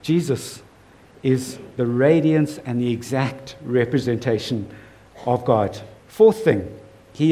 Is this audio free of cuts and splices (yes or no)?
no